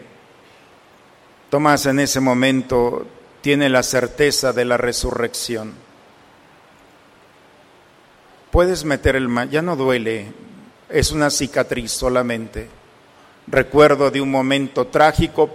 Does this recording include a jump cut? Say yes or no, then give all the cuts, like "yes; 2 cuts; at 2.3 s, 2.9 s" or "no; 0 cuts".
no; 0 cuts